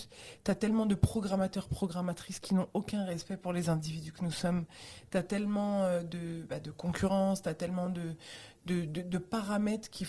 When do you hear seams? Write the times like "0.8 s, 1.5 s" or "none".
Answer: none

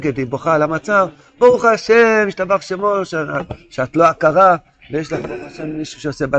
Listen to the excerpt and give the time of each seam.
none

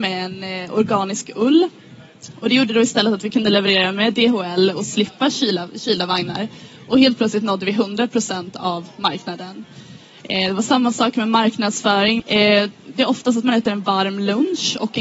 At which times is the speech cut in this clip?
12.2 s

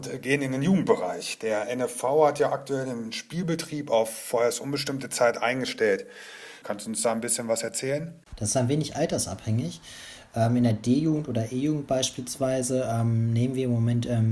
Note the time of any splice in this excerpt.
6.6 s, 8.2 s

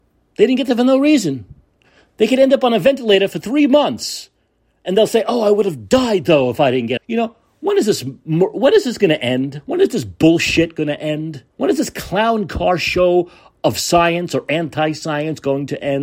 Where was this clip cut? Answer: 7.0 s, 11.5 s

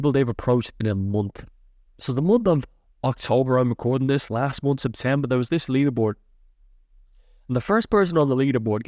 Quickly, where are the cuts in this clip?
none

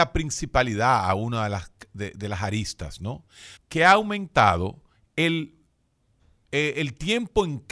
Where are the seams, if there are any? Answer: 3.6 s

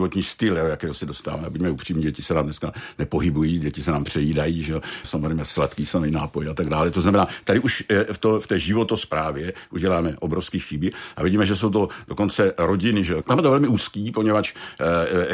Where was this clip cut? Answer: 5.0 s, 13.2 s

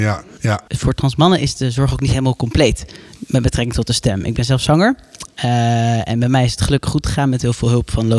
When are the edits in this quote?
none

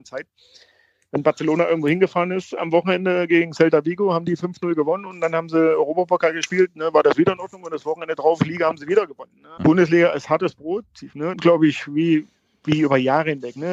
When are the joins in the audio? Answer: 9.6 s, 11.3 s

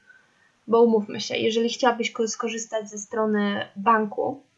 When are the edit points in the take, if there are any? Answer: none

